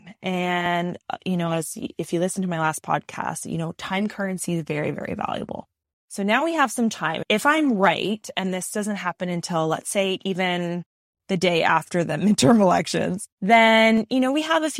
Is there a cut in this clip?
yes; 1 cut; at 13.3 s

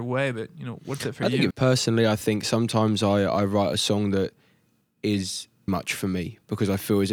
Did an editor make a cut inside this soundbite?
yes; 2 cuts; at 1.5 s, 5.7 s

